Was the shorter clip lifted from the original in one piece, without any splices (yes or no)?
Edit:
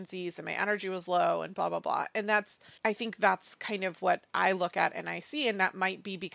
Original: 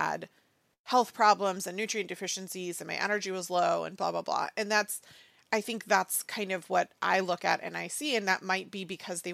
no